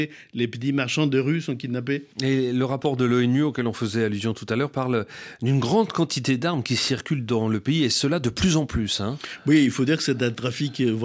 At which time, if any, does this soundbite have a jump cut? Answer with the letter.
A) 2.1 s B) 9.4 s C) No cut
A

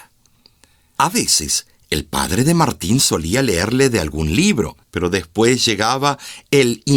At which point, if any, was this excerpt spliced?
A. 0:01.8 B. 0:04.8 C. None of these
B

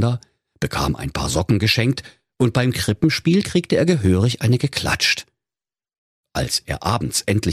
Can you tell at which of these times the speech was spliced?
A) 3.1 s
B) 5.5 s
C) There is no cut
C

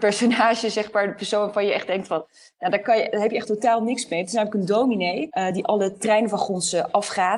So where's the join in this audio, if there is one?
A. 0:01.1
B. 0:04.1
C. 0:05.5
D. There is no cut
D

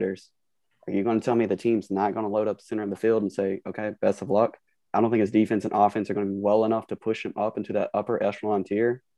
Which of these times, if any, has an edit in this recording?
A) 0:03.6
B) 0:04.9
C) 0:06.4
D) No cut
B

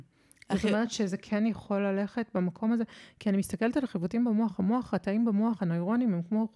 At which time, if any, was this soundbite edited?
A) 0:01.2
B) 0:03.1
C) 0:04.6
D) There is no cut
D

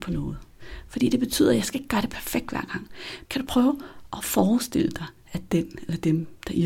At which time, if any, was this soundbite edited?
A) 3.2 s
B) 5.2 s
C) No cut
A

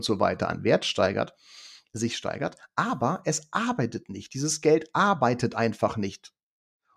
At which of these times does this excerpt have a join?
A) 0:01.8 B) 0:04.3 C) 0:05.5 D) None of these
D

